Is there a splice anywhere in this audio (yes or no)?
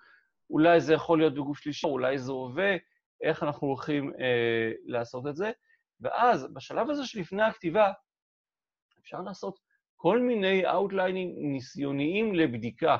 yes